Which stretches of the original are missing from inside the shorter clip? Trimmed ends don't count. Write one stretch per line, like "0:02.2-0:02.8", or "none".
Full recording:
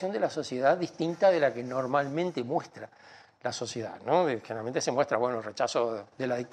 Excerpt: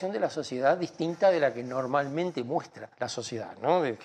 0:02.9-0:03.4